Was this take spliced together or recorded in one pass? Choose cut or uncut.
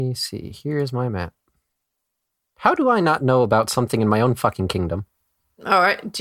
uncut